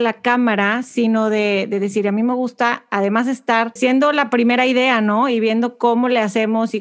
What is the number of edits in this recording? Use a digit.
1